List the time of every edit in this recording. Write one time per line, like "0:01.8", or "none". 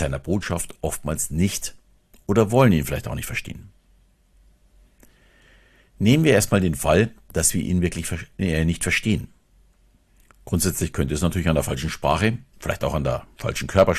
0:12.5